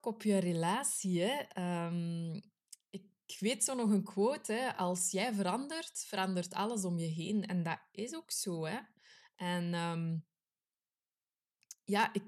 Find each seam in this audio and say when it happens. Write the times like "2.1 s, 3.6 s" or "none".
none